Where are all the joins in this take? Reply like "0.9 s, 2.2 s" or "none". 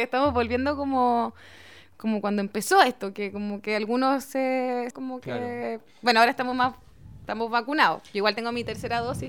4.9 s